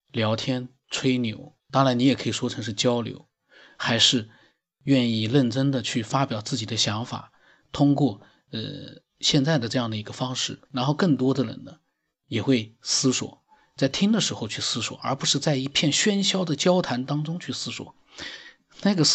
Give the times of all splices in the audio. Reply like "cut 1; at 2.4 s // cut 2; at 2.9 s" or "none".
cut 1; at 1.6 s // cut 2; at 10.7 s